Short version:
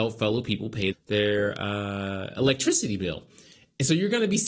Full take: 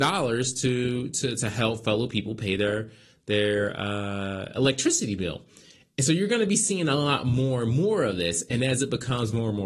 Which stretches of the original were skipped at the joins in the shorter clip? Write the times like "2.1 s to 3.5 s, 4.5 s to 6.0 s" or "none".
2.6 s to 3.1 s